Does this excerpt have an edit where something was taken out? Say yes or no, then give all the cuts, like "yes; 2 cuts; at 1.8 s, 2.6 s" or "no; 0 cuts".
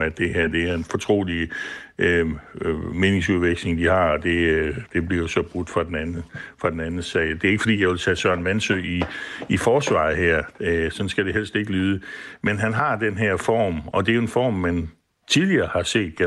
no; 0 cuts